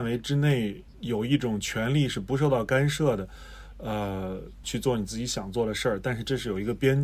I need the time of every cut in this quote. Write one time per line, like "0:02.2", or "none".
0:04.6